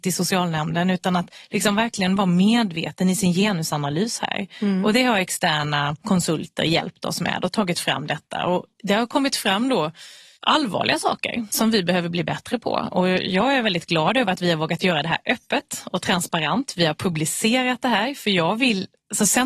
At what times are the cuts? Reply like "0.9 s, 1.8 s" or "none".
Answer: none